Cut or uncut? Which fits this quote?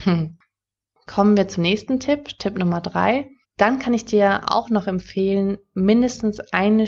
cut